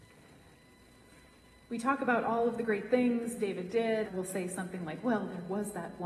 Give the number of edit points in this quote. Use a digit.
1